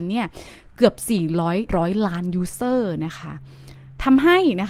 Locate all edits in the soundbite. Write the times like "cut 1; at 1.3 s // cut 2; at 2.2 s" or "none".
cut 1; at 1.7 s